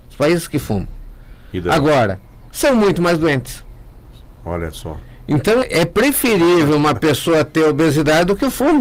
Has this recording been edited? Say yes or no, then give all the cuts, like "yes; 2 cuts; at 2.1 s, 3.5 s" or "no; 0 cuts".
yes; 1 cut; at 5.6 s